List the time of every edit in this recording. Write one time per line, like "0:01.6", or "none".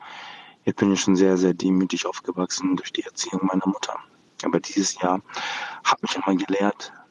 0:06.1